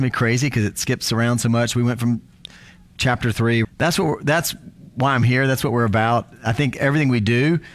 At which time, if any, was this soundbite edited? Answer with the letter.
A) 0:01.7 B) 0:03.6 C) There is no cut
B